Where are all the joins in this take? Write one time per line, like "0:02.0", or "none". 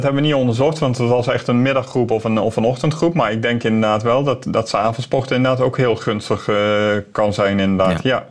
none